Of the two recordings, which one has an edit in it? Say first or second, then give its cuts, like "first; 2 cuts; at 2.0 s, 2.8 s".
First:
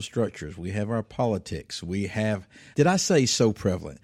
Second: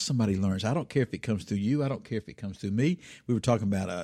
first; 1 cut; at 2.7 s